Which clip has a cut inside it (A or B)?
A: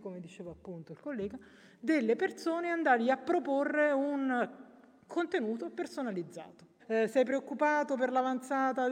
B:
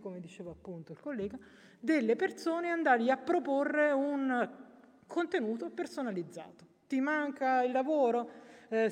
A